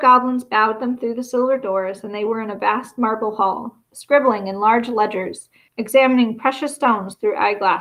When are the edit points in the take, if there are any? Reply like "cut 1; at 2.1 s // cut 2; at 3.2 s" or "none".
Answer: cut 1; at 3.9 s // cut 2; at 5.7 s